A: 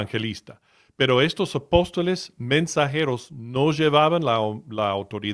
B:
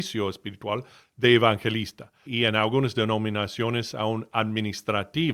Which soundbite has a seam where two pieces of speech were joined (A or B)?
B